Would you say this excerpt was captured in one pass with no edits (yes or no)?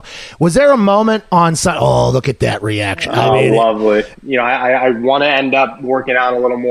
no